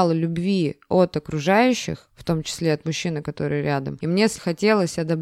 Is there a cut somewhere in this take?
no; 0 cuts

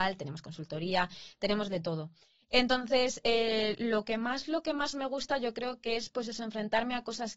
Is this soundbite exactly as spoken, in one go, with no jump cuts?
yes; 0 cuts

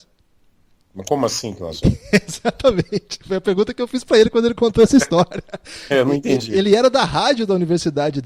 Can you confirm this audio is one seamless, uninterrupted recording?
yes; 0 cuts

